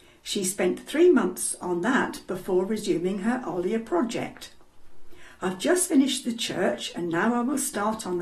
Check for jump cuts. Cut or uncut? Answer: uncut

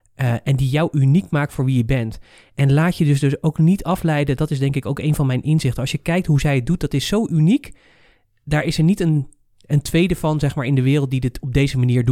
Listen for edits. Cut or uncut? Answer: uncut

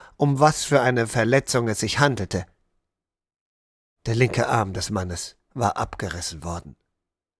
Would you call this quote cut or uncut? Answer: uncut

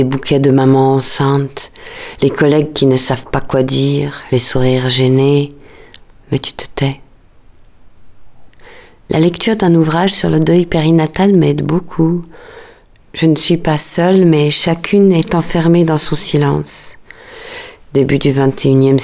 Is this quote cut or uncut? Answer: uncut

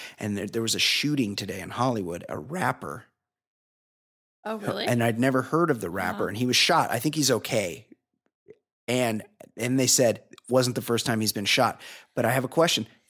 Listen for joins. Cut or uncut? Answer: uncut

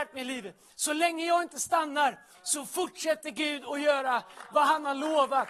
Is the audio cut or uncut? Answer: uncut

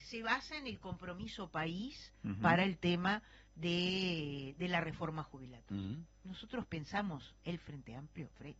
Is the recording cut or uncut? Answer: uncut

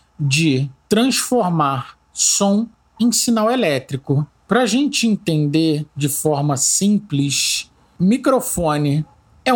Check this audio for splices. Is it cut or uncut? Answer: cut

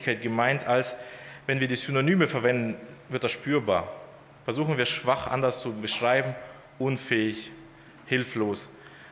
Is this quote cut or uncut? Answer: uncut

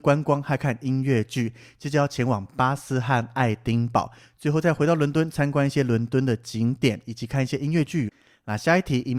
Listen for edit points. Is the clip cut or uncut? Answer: cut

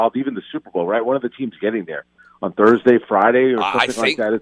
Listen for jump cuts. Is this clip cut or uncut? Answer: uncut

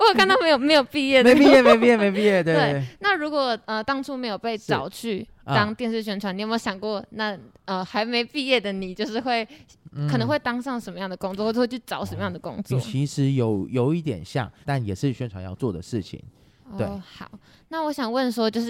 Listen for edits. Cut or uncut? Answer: cut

